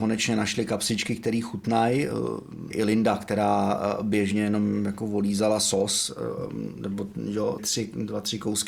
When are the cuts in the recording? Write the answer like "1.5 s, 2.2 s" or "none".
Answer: 2.7 s, 7.6 s